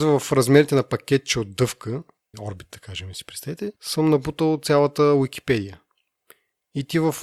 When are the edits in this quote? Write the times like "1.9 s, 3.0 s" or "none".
2.3 s, 3.8 s